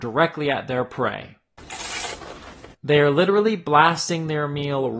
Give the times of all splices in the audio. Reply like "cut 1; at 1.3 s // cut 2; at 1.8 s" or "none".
cut 1; at 2.7 s